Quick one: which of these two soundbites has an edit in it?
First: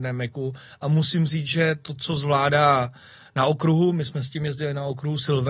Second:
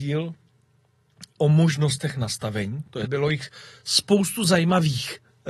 second; 2 cuts; at 1.4 s, 3.0 s

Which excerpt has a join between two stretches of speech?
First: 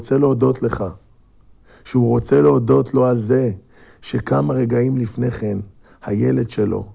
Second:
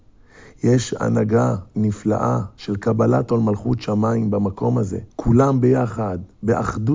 second; 1 cut; at 5.1 s

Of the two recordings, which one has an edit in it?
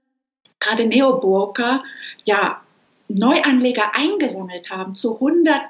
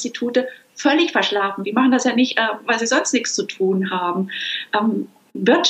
second; 1 cut; at 1.6 s

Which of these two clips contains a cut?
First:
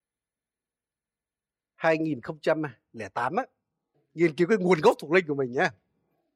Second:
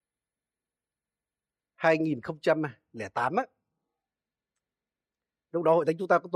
first; 1 cut; at 3.9 s

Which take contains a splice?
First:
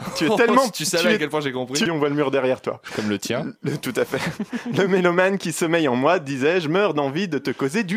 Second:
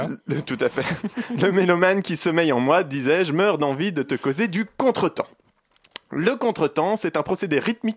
first; 2 cuts; at 1.9 s, 2.9 s

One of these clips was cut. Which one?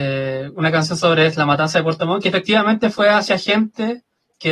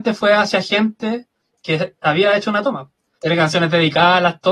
second; 1 cut; at 3.2 s

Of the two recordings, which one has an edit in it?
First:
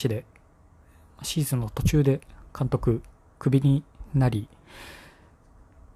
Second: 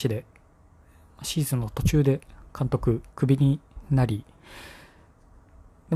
second; 1 cut; at 3.1 s

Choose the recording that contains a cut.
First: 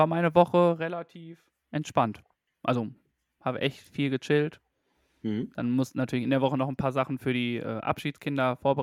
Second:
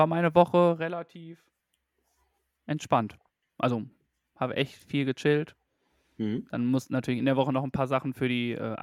first; 1 cut; at 1.6 s

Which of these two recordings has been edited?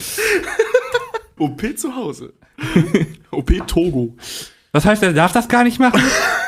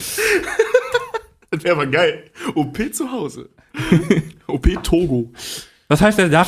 first; 1 cut; at 1.4 s

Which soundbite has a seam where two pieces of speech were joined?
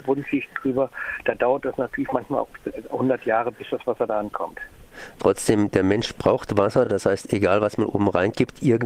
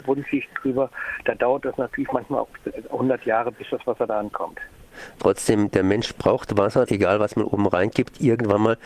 second; 1 cut; at 6.9 s

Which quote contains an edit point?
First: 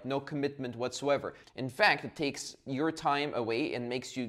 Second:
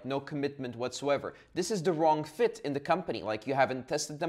first; 1 cut; at 1.4 s

